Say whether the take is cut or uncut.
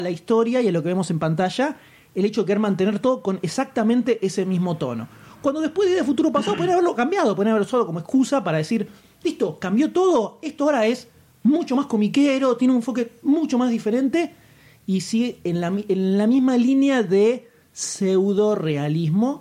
uncut